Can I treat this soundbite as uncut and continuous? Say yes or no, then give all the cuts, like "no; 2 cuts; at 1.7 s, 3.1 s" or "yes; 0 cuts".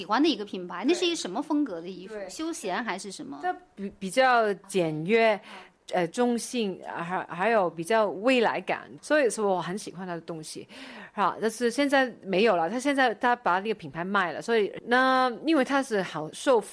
yes; 0 cuts